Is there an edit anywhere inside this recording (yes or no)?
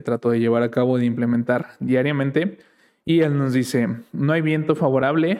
no